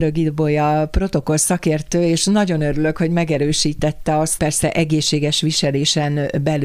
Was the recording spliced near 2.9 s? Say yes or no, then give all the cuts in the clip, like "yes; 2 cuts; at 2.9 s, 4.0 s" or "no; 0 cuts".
no; 1 cut; at 4.4 s